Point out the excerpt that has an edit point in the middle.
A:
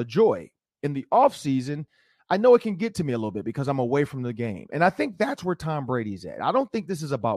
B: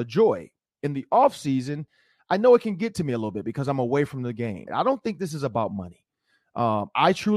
B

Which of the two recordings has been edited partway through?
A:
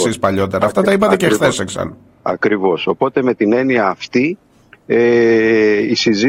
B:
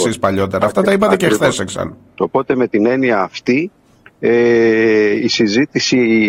B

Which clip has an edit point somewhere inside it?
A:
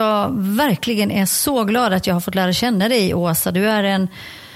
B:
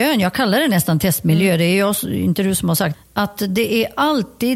B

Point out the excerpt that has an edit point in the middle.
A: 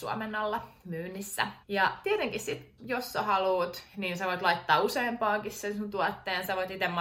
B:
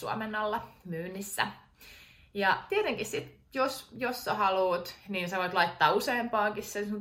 A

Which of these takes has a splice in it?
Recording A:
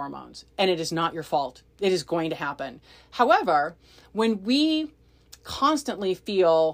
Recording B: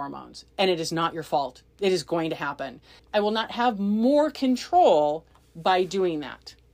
B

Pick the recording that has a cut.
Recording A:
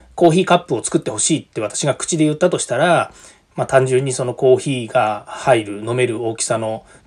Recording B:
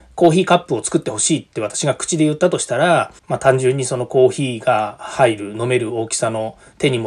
B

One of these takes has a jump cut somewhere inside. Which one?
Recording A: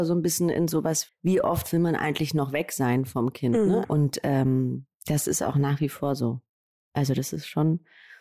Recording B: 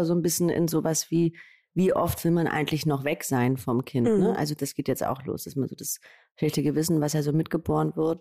A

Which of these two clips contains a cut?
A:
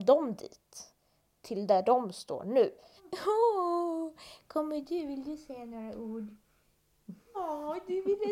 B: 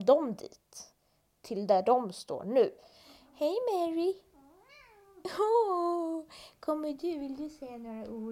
A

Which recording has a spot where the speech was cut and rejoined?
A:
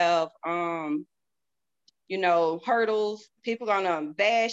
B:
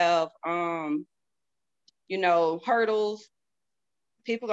A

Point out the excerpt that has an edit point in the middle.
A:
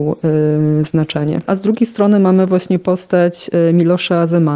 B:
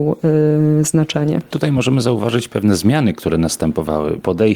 A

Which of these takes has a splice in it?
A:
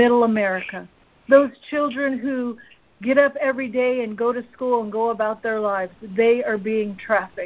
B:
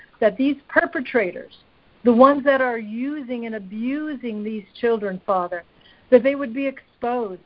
B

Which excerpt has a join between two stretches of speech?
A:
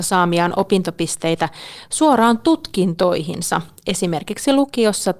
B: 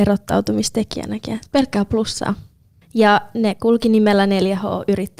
B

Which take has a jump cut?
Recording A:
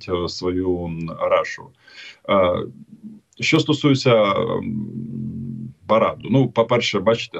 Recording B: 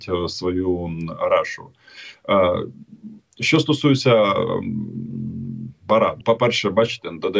B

